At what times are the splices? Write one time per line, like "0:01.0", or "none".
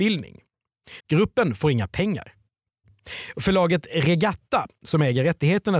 0:01.0